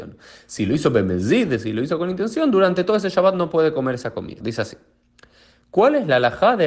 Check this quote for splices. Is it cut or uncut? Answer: cut